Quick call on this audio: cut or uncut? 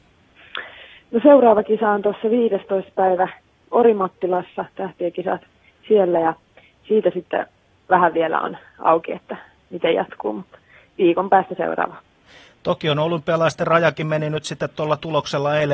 uncut